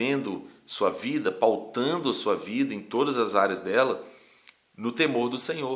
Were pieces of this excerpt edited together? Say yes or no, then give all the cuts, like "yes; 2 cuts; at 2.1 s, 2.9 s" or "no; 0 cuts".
no; 0 cuts